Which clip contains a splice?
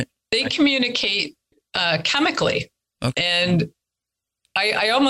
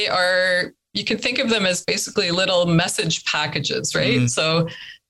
first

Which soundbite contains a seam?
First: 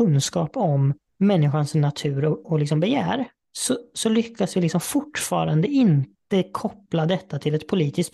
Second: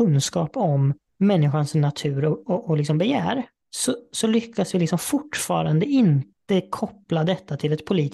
first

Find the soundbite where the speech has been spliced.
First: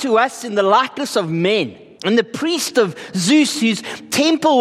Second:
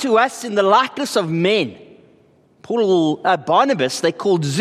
first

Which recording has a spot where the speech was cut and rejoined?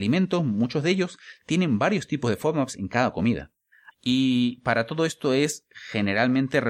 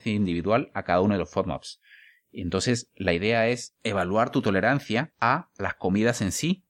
first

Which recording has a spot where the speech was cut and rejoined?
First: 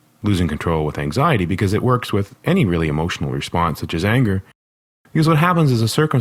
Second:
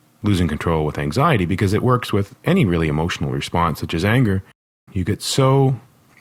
second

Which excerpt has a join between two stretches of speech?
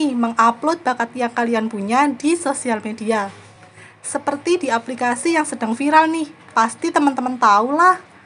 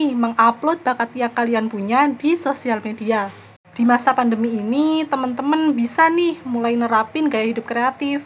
second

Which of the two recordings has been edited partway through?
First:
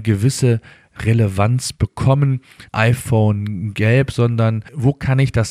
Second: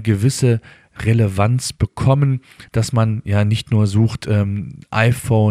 first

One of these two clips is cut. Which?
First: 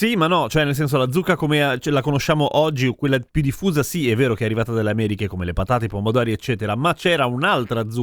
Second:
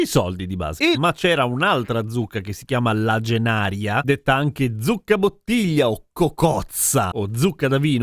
second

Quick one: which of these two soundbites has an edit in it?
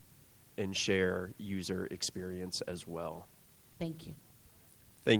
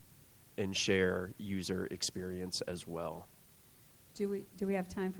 first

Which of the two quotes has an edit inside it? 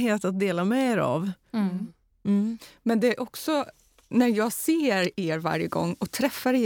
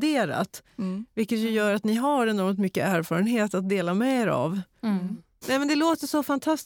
second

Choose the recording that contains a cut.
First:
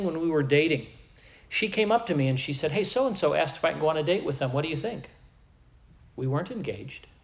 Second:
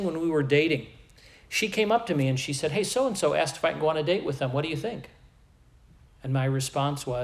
second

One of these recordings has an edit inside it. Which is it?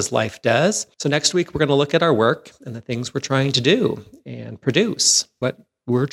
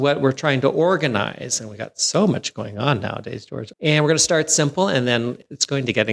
second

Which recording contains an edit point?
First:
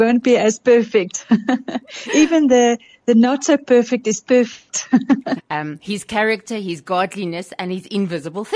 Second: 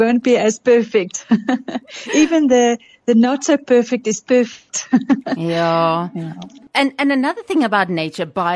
first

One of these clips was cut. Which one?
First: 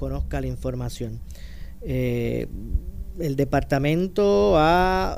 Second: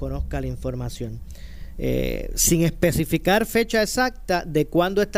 second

